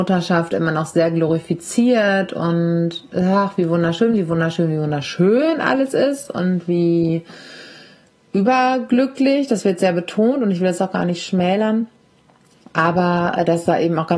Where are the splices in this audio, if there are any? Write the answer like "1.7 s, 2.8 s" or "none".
none